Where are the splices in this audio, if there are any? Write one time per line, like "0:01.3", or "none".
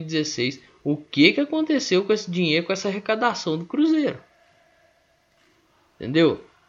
none